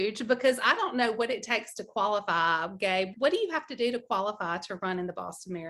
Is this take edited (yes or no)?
yes